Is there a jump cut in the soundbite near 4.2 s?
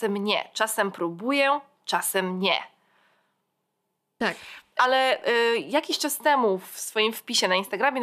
yes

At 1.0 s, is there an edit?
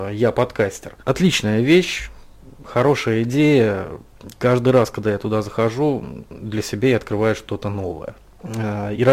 yes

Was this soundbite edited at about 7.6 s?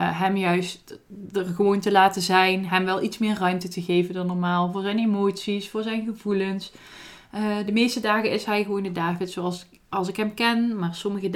no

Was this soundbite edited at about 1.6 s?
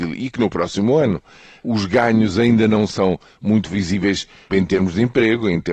no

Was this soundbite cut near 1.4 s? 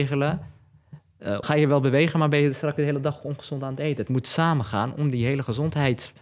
yes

